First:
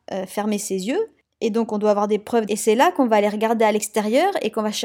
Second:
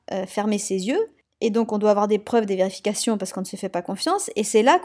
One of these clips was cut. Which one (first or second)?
first